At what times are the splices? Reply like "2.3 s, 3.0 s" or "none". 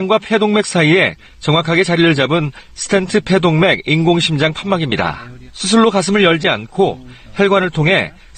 5.5 s